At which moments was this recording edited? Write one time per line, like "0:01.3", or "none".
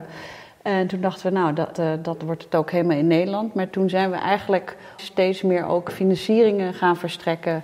0:01.7
0:05.0